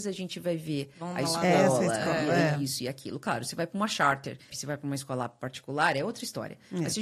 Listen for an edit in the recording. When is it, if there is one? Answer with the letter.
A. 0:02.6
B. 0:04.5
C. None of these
B